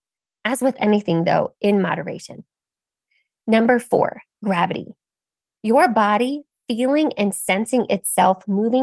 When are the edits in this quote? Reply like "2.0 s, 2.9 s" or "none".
none